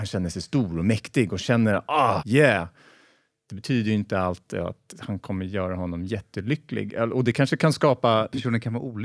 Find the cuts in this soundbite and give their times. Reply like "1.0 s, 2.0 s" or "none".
2.2 s